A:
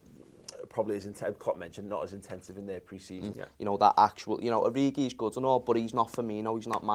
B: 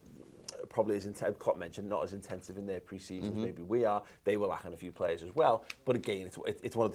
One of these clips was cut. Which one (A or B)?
A